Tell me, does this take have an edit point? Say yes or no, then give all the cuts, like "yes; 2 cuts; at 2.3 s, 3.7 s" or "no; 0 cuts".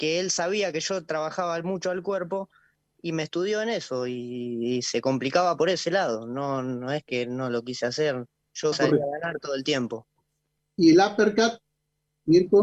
yes; 1 cut; at 8.7 s